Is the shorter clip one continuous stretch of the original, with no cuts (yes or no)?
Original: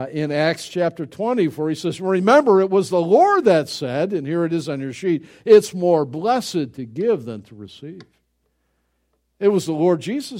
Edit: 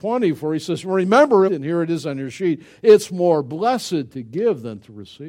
no